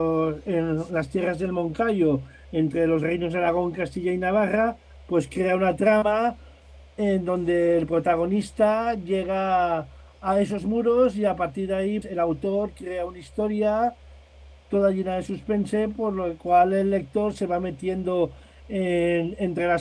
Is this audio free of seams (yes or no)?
no